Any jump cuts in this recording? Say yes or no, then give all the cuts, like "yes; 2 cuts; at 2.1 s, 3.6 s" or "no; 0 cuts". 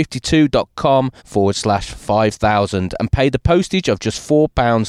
yes; 1 cut; at 1.2 s